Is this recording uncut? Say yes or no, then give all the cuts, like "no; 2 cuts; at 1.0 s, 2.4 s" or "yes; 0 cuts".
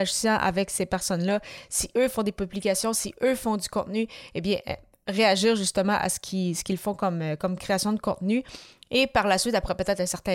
yes; 0 cuts